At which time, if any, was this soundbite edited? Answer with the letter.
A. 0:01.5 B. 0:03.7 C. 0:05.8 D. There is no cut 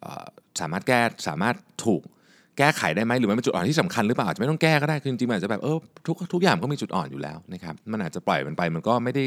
D